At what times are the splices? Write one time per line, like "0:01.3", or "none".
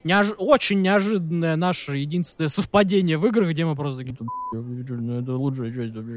0:04.1